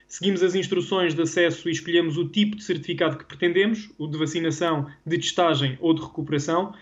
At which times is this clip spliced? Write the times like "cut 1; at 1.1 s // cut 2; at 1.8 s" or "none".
none